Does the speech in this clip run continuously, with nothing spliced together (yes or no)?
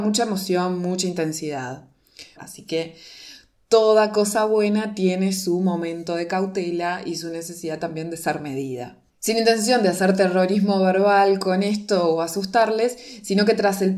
no